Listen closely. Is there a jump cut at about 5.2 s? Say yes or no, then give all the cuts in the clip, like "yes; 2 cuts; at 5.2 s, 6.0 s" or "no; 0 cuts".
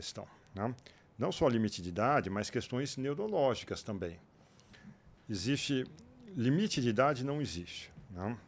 yes; 1 cut; at 5.2 s